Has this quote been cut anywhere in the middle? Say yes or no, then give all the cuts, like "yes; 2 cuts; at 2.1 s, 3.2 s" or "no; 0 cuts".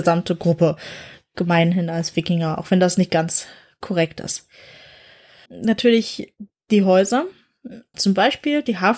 yes; 2 cuts; at 5.4 s, 7.9 s